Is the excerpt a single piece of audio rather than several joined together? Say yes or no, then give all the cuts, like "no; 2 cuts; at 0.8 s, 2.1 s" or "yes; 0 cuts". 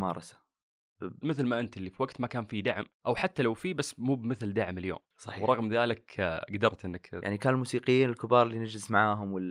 no; 1 cut; at 1.2 s